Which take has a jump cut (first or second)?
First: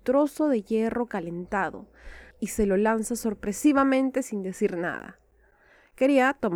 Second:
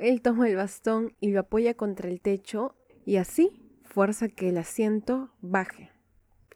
first